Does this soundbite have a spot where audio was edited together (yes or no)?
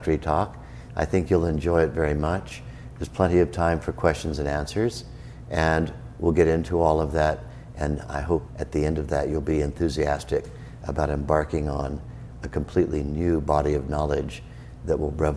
yes